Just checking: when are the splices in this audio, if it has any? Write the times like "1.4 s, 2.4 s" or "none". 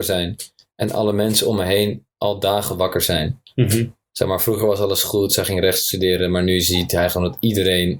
2.2 s